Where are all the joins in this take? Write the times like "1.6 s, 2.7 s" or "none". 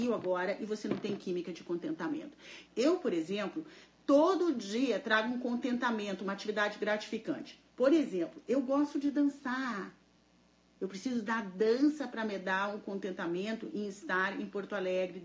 2.6 s